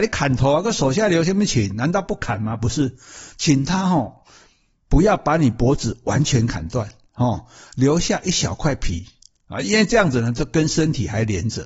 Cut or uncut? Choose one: uncut